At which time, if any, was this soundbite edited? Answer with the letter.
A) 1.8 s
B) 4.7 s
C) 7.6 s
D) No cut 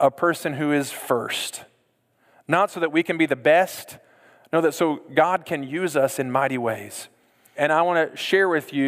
C